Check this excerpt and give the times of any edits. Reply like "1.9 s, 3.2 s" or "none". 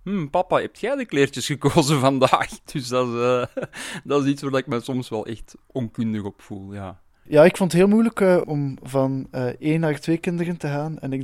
7.3 s, 8.4 s